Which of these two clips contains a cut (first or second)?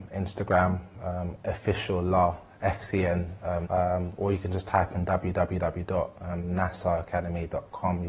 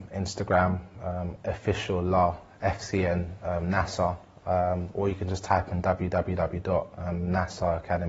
first